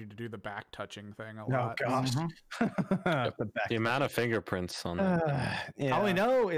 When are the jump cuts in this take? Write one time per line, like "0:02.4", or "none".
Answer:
none